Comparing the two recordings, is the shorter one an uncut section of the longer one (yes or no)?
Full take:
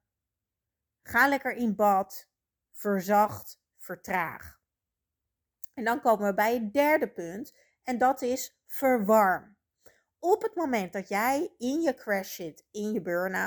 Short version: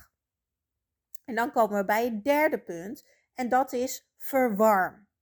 yes